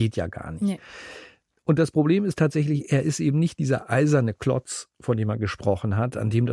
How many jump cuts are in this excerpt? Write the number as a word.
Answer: zero